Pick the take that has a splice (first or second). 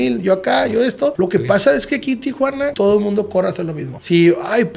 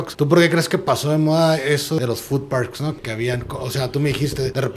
first